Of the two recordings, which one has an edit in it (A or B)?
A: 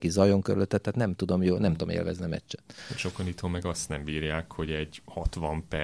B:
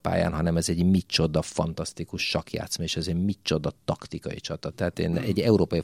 B